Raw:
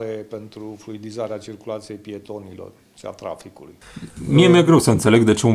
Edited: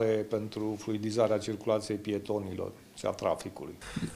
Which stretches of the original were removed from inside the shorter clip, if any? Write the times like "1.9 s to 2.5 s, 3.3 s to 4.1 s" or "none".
none